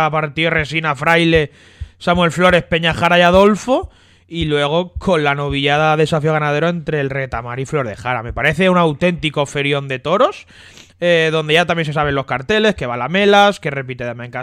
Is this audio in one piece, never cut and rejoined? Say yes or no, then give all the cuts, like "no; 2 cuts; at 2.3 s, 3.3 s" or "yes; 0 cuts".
yes; 0 cuts